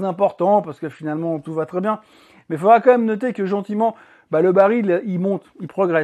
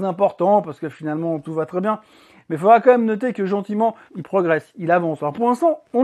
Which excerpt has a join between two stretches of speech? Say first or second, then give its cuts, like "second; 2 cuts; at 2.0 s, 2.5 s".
second; 1 cut; at 4.1 s